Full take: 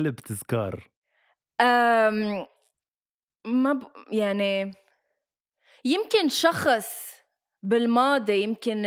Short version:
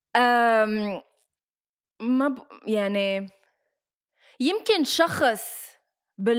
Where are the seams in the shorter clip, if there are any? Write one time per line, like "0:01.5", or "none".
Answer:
none